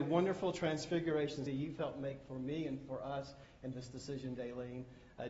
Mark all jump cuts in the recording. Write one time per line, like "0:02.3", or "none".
0:01.5